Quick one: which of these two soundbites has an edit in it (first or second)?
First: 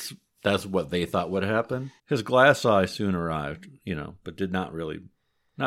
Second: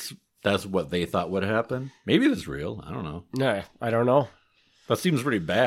first